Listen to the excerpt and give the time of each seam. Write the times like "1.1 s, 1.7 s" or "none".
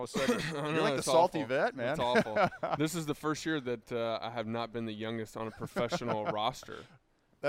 none

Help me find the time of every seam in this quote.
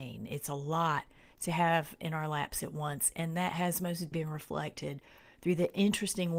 4.1 s

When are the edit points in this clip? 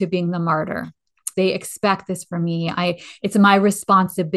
1.3 s

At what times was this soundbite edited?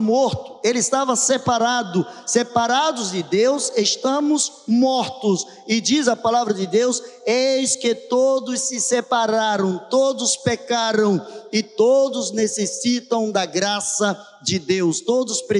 none

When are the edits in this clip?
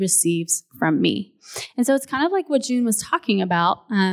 none

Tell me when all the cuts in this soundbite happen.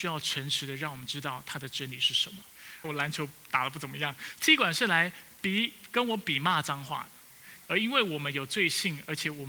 2.8 s, 7.6 s

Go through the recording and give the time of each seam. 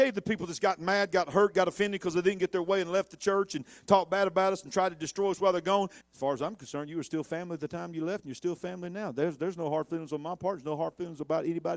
6.0 s

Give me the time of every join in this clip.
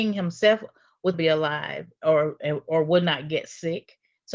1.1 s

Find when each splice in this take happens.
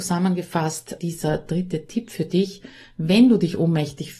1.0 s

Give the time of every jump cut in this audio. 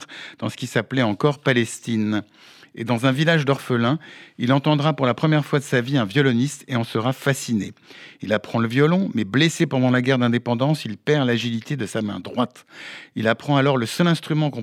none

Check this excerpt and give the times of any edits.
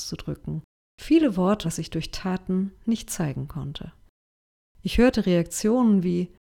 1.6 s

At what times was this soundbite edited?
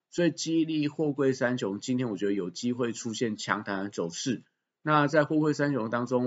none

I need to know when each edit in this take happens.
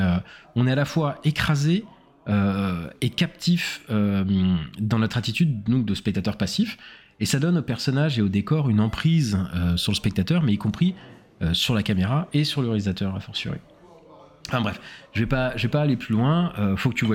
none

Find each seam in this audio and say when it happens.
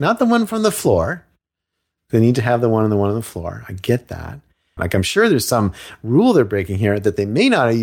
4.8 s

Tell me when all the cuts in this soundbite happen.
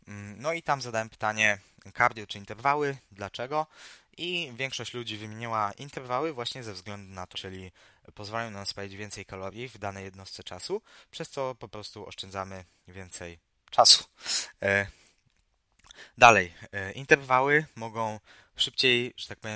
7.3 s

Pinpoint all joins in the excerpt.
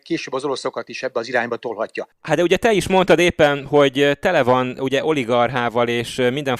none

